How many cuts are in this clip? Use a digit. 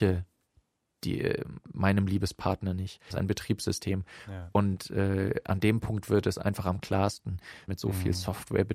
2